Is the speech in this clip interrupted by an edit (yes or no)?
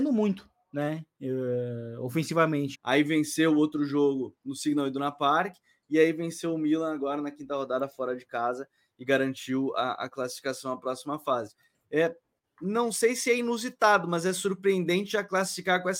yes